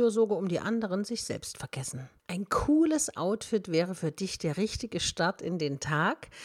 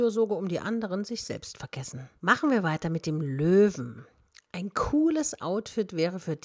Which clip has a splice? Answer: first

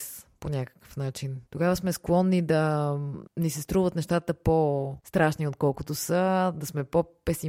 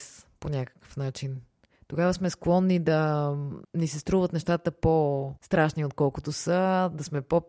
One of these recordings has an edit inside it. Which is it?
first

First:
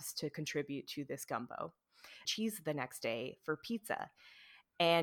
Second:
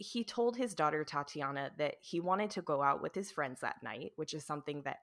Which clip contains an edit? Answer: first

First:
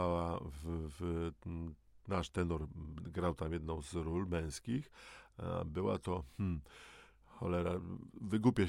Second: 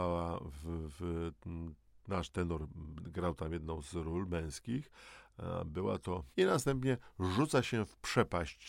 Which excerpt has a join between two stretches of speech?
second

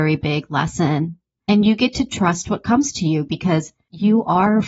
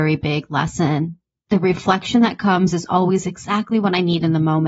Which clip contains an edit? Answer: first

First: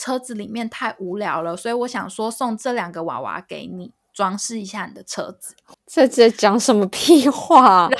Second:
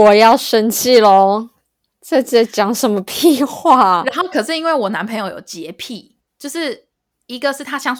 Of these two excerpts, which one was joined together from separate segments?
first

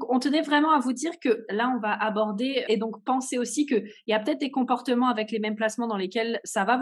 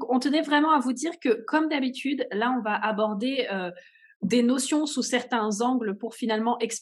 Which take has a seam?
first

